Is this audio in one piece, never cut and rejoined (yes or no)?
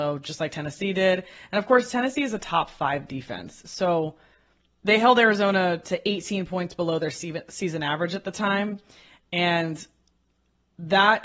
yes